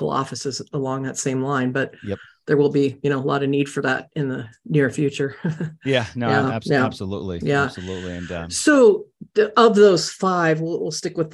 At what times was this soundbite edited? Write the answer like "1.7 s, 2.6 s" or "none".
none